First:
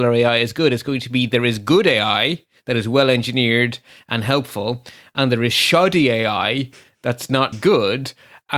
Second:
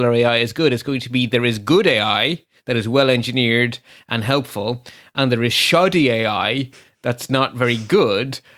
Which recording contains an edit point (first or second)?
first